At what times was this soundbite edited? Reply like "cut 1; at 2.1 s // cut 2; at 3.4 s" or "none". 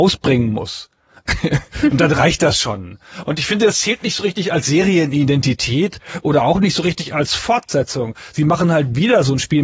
none

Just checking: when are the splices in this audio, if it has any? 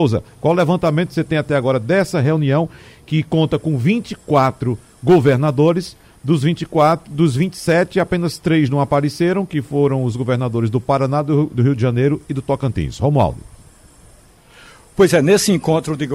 none

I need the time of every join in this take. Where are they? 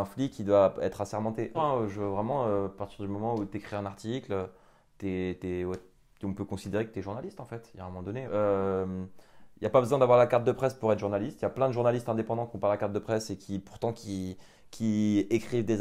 cut 1; at 1.5 s // cut 2; at 8.3 s

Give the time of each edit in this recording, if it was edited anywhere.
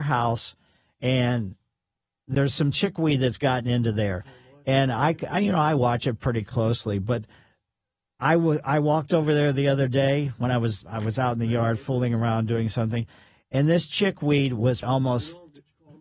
cut 1; at 10.8 s // cut 2; at 14.8 s

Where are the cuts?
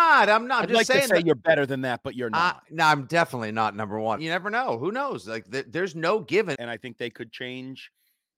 cut 1; at 4.2 s // cut 2; at 6.5 s

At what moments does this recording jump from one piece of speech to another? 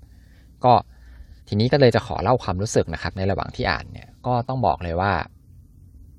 cut 1; at 1.4 s

